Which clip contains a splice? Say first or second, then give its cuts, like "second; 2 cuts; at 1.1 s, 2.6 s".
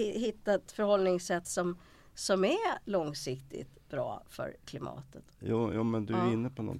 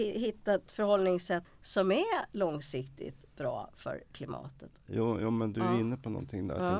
second; 1 cut; at 1.4 s